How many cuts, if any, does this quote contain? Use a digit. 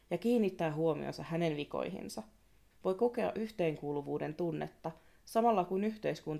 1